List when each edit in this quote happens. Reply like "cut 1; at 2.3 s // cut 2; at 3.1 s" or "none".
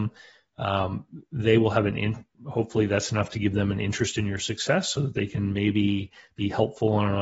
none